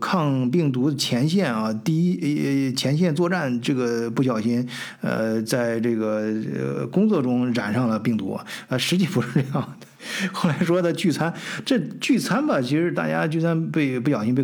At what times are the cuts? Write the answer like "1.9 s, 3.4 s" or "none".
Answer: none

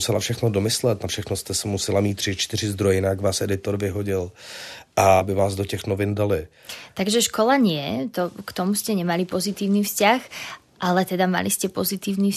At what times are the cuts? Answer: 5.2 s

